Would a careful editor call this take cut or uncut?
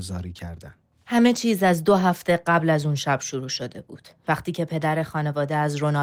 uncut